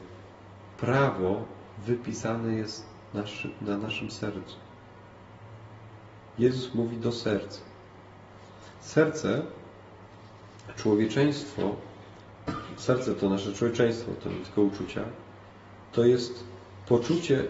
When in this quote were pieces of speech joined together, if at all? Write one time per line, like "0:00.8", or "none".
none